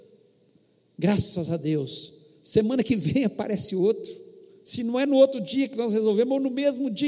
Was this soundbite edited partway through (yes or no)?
no